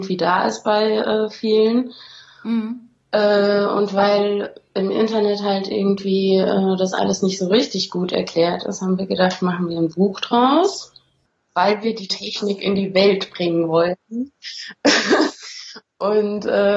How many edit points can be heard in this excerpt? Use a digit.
0